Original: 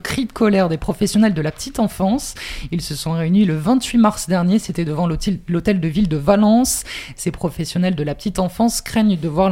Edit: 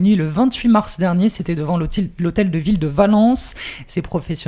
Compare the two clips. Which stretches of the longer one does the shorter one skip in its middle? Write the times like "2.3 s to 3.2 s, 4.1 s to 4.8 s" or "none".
none